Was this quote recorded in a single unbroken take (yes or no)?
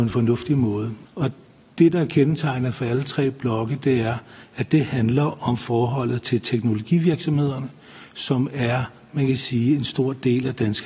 no